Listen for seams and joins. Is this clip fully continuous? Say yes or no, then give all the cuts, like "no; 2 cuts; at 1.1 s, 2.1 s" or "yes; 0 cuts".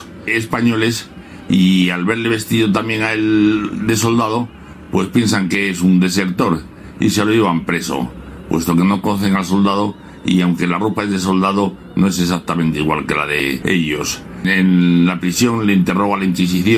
yes; 0 cuts